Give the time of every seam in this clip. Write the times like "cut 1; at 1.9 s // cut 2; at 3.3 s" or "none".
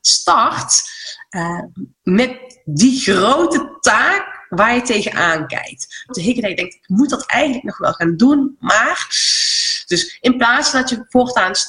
cut 1; at 1.9 s // cut 2; at 6.1 s // cut 3; at 9.9 s